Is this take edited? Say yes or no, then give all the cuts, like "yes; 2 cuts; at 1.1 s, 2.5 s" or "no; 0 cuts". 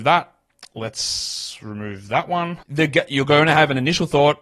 yes; 1 cut; at 2.6 s